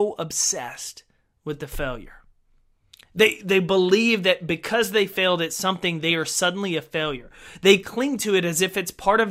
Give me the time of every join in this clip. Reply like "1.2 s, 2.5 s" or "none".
none

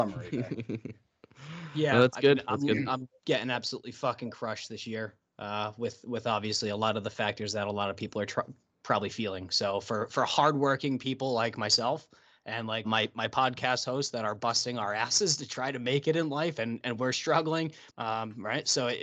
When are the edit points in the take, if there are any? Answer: 12.8 s, 17.9 s

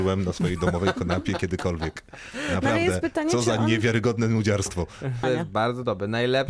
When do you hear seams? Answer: 5.2 s

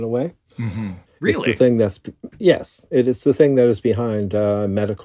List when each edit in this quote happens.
1.1 s

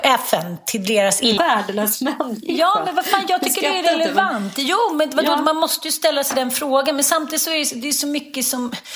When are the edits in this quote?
1.4 s

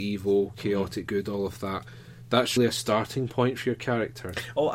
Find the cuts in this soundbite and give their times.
2.6 s

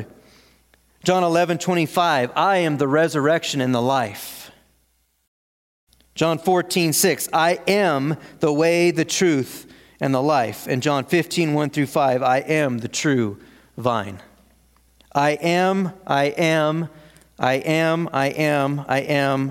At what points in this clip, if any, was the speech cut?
none

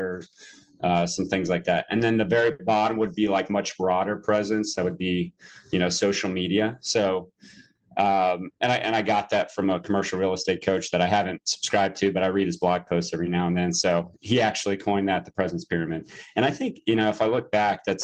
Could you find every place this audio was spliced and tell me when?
none

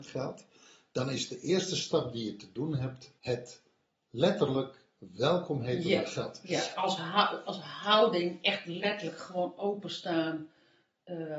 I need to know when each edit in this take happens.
3.2 s, 6.8 s

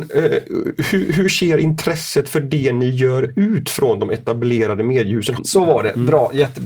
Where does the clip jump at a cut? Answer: 5.4 s

